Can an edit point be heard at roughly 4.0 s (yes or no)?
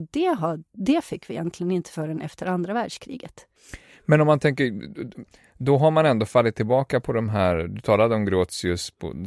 no